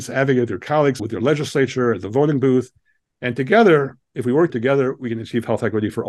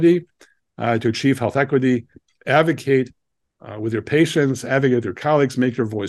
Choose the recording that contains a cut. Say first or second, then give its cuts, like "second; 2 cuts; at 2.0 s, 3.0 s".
first; 2 cuts; at 1.0 s, 4.5 s